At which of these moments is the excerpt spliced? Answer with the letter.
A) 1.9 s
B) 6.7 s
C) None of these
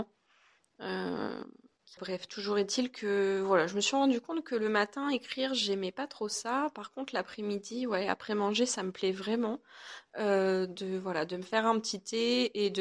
A